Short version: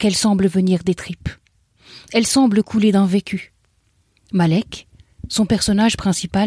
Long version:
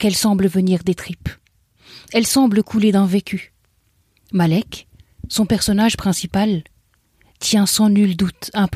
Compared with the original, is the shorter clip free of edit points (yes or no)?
yes